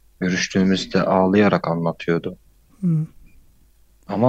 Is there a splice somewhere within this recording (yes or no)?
no